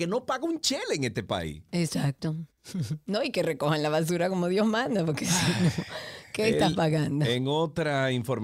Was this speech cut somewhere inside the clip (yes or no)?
yes